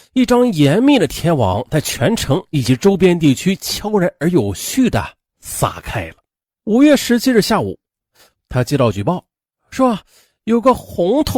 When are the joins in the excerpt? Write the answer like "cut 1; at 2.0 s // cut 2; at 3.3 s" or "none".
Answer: cut 1; at 6.5 s // cut 2; at 8.3 s